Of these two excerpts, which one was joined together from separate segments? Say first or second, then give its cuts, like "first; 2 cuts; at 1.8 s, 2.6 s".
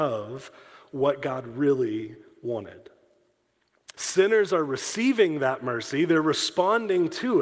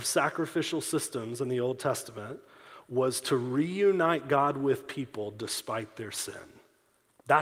first; 1 cut; at 3.9 s